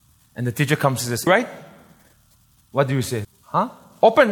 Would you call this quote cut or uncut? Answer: cut